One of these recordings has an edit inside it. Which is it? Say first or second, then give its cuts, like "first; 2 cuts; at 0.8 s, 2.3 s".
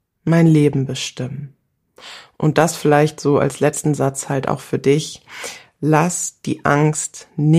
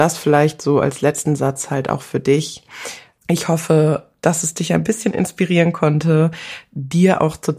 second; 1 cut; at 3.2 s